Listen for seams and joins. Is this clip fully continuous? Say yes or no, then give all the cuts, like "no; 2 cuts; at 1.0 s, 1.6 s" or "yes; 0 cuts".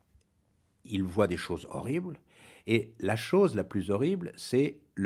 no; 1 cut; at 1.7 s